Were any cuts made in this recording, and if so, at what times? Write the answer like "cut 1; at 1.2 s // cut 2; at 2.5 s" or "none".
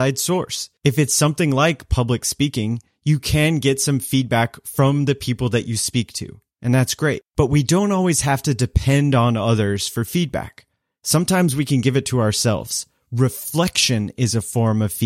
none